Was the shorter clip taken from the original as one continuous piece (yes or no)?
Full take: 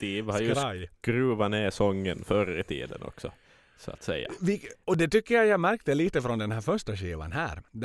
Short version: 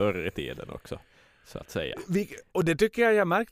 yes